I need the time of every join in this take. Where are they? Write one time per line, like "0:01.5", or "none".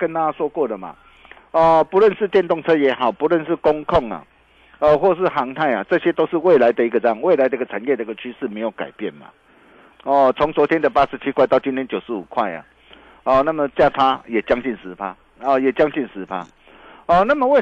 0:09.9